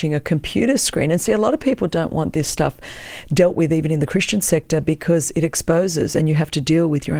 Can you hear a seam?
no; 0 cuts

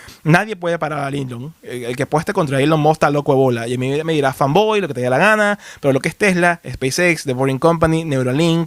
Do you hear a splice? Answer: no; 0 cuts

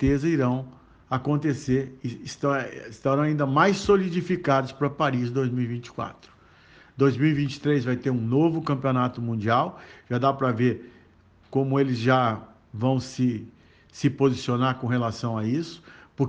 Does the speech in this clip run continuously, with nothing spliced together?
yes; 0 cuts

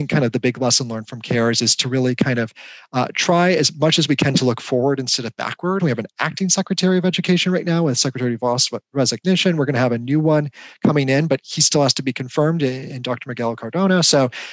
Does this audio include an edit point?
yes; 1 cut; at 5.8 s

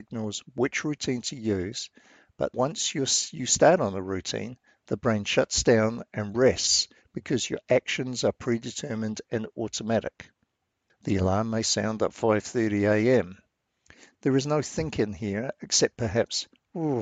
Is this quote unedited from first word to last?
no; 2 cuts; at 2.5 s, 10.9 s

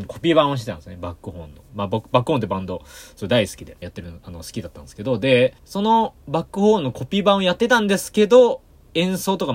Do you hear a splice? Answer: yes; 2 cuts; at 3.8 s, 5.6 s

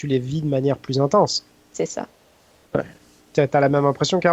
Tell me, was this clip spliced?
no; 0 cuts

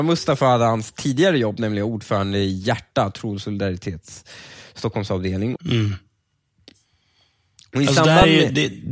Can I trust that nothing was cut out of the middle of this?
no; 1 cut; at 5.6 s

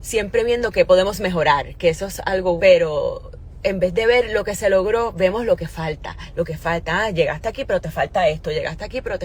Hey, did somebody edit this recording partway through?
yes; 1 cut; at 2.6 s

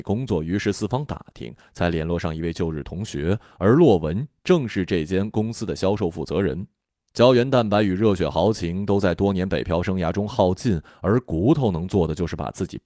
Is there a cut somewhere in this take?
yes; 1 cut; at 7.0 s

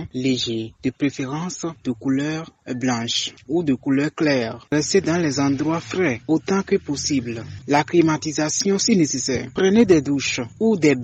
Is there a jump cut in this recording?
yes; 1 cut; at 7.6 s

